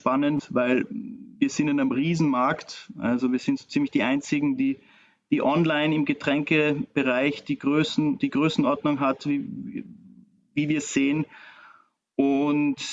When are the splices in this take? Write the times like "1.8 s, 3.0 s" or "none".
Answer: none